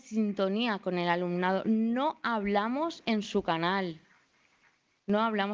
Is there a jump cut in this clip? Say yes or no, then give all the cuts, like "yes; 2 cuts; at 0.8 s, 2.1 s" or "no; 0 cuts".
no; 0 cuts